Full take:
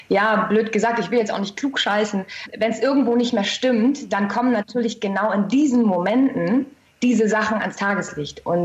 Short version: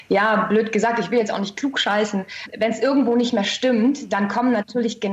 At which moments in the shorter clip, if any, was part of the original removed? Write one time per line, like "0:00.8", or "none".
none